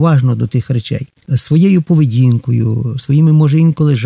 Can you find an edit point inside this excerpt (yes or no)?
yes